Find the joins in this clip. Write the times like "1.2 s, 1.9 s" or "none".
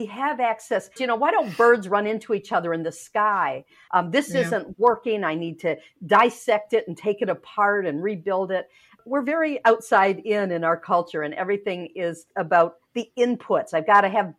1.0 s, 3.9 s